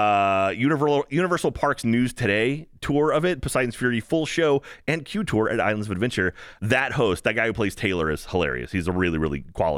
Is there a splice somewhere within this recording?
no; 0 cuts

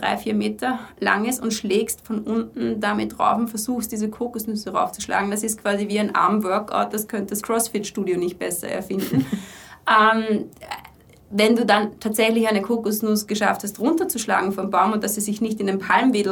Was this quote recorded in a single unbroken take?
yes; 0 cuts

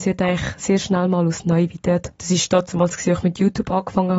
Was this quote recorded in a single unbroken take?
no; 1 cut; at 2.2 s

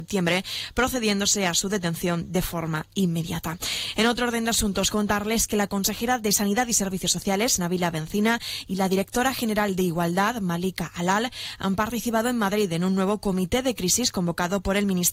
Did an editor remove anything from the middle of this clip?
no; 0 cuts

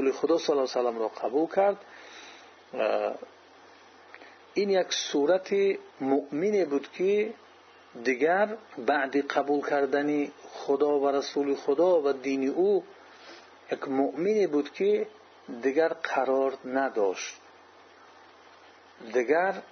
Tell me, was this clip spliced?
yes; 2 cuts; at 5.9 s, 8.7 s

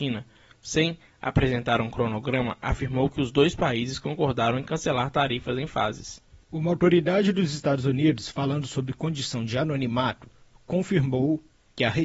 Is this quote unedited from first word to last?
no; 1 cut; at 6.4 s

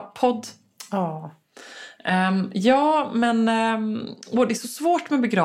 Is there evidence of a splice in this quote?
no; 0 cuts

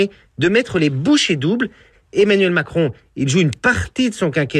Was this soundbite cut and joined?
yes; 1 cut; at 1.9 s

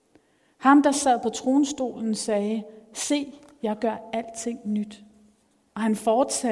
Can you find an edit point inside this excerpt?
no; 0 cuts

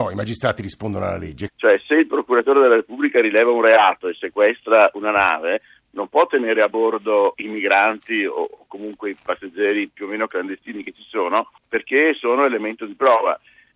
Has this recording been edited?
yes; 3 cuts; at 1.5 s, 7.3 s, 11.6 s

